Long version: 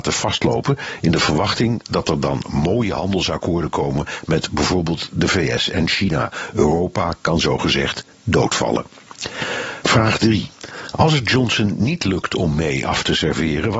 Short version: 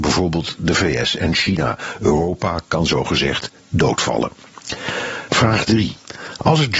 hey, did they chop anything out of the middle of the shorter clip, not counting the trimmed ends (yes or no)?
no